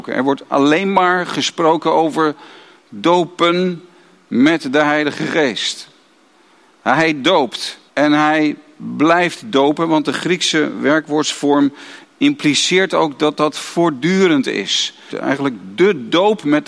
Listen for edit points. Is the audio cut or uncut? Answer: cut